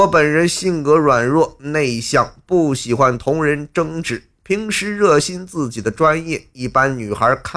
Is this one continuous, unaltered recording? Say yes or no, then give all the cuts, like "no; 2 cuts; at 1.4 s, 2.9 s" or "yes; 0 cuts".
yes; 0 cuts